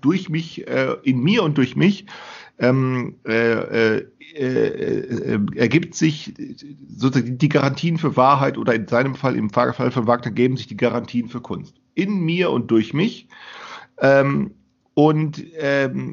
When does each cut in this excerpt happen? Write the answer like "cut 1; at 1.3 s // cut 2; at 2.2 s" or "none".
none